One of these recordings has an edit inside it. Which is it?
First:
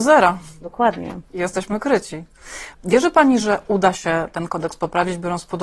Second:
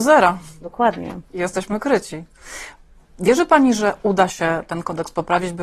first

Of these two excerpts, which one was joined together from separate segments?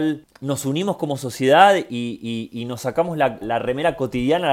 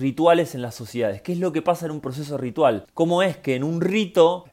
first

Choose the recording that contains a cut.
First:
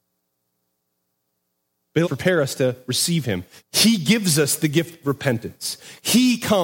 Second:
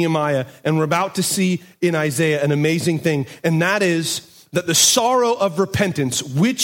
first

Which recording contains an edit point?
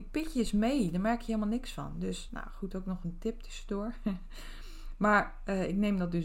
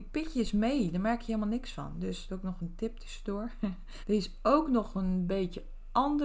second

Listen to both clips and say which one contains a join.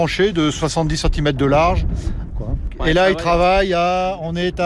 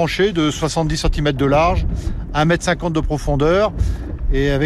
first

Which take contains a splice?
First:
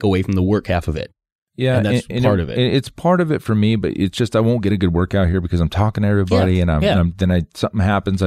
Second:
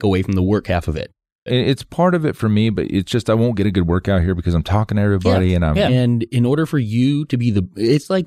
second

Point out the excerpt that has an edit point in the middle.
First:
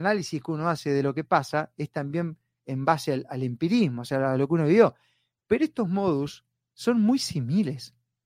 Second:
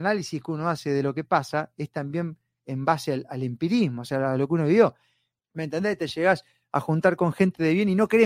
second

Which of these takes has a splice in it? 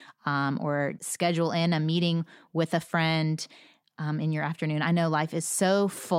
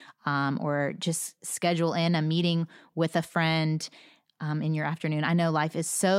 first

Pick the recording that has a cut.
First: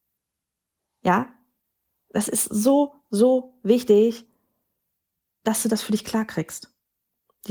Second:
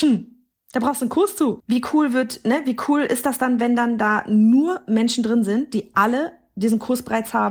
second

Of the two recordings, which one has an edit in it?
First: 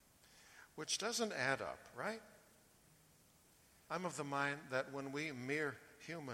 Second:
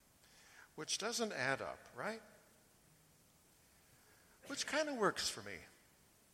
first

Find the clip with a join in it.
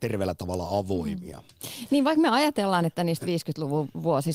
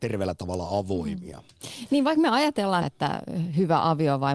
second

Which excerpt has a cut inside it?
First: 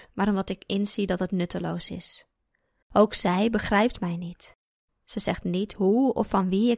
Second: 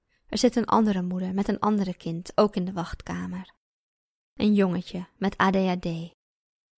first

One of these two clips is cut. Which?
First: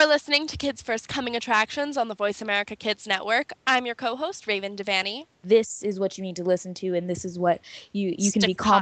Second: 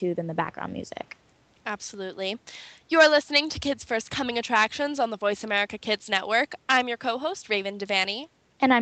first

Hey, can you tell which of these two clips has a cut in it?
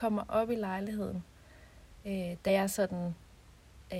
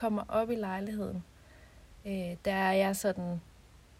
first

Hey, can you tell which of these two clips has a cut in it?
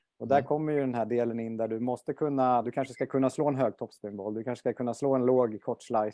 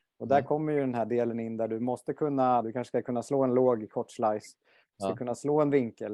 second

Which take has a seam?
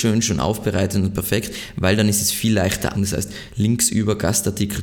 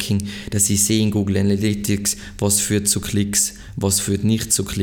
first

